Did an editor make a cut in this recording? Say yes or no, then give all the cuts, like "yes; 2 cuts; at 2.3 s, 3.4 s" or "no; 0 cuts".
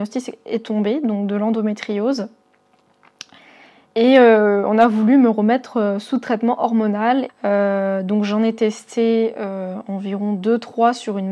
yes; 1 cut; at 7.3 s